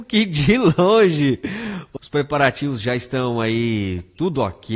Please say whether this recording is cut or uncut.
cut